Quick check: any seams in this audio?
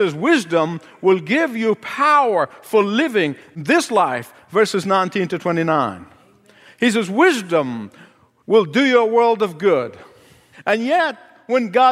yes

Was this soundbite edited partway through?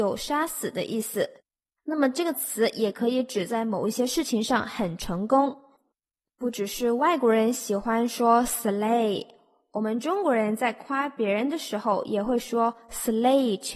no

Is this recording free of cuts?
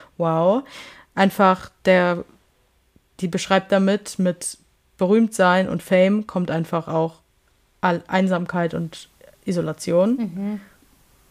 yes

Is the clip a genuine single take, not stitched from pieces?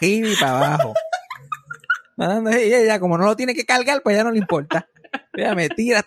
yes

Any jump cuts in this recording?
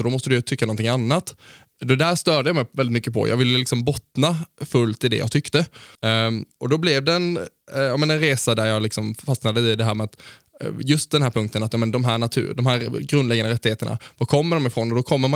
yes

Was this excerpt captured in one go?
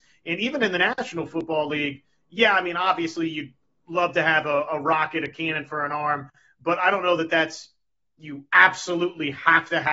yes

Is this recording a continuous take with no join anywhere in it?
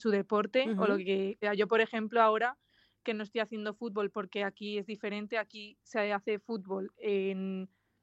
no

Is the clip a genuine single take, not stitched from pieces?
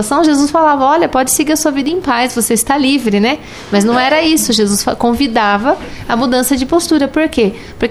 yes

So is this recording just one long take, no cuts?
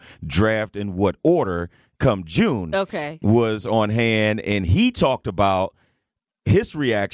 no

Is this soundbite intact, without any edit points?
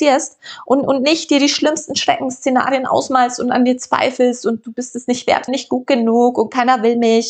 no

